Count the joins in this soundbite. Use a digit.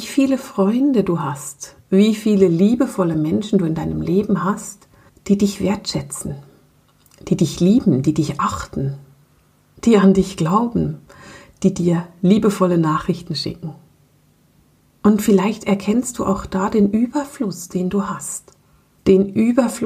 0